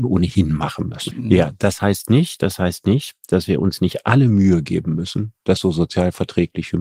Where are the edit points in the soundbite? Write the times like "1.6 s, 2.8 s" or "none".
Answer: 1.1 s